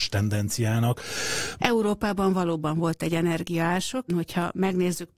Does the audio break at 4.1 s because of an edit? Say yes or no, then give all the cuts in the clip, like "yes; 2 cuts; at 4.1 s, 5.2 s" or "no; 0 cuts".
yes; 2 cuts; at 1.6 s, 4.1 s